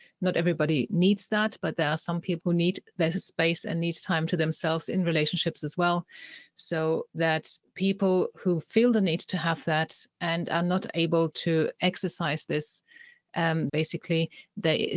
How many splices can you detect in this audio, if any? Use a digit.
2